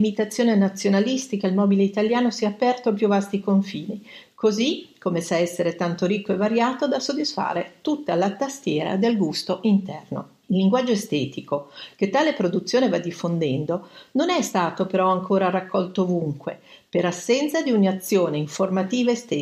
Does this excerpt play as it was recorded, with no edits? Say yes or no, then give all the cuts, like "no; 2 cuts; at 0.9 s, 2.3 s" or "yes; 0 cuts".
no; 1 cut; at 10.4 s